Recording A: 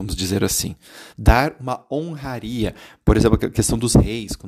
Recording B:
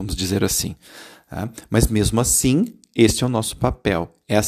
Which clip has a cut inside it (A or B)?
A